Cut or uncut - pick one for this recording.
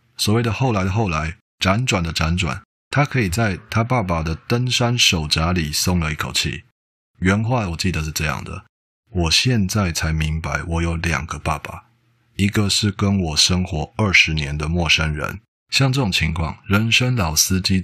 cut